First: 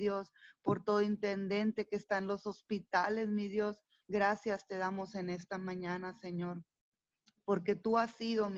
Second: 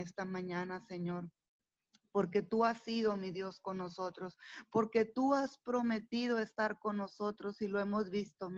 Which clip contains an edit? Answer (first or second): first